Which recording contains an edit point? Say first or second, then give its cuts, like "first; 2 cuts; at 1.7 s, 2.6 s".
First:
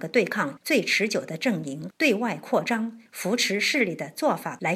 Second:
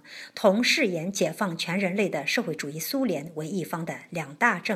first; 1 cut; at 3.1 s